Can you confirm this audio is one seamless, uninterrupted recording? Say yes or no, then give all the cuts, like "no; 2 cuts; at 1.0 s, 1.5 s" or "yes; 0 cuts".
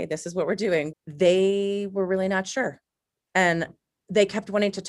no; 2 cuts; at 0.9 s, 3.3 s